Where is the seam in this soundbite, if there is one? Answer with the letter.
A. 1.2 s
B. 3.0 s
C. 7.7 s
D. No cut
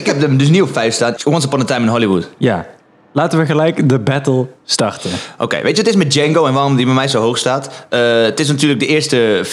A